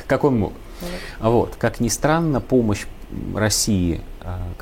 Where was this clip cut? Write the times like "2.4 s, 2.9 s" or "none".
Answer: 1.6 s